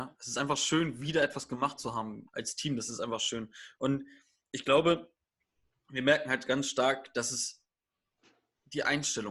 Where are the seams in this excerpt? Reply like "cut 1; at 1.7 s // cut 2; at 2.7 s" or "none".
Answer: cut 1; at 2.3 s

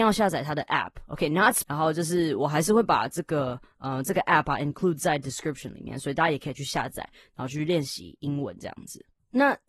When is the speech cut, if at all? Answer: cut 1; at 1.6 s

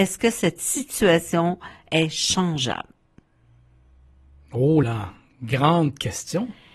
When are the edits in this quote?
cut 1; at 4.8 s

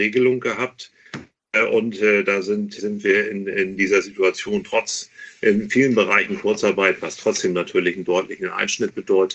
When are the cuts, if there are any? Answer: cut 1; at 2.8 s

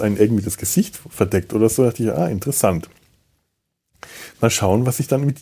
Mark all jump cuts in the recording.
none

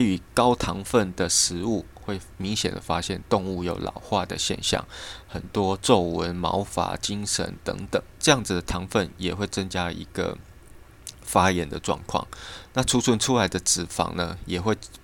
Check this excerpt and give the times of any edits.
cut 1; at 8.1 s

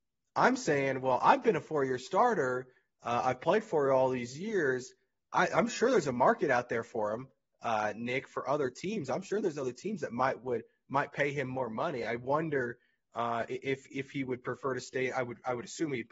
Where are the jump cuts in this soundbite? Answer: none

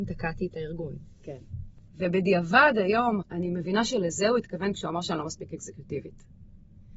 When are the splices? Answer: cut 1; at 1.9 s // cut 2; at 3.2 s

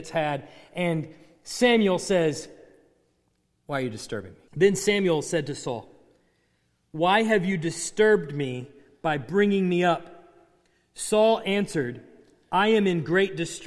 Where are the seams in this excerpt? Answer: cut 1; at 4.5 s

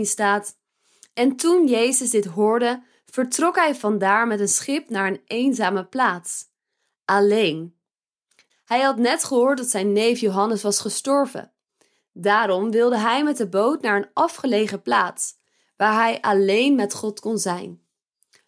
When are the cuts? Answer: cut 1; at 8.5 s

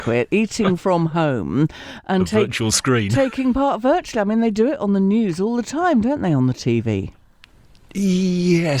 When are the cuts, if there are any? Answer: none

